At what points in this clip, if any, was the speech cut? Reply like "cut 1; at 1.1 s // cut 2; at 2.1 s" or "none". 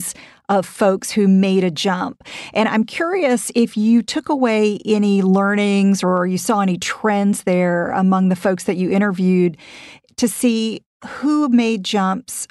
none